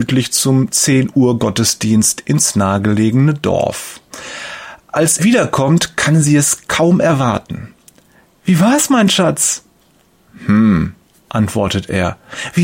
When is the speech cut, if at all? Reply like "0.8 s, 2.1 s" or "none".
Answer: 5.2 s